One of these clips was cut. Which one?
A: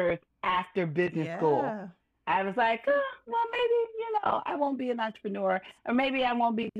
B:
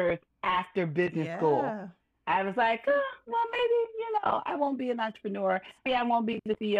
B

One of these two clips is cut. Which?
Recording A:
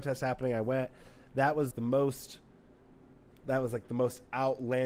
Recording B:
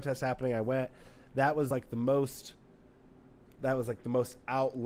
A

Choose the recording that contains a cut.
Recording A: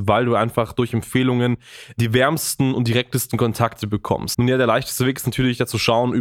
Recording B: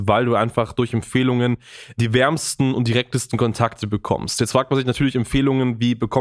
A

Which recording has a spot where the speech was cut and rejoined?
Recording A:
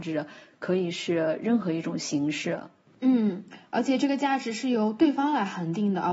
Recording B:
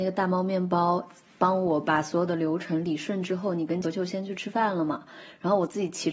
B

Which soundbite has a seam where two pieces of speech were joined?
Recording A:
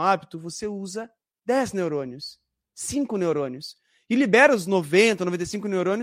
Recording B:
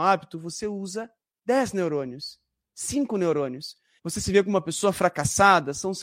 B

